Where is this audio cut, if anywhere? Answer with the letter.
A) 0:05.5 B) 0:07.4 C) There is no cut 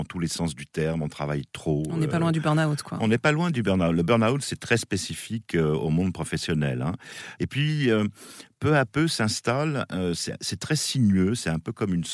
B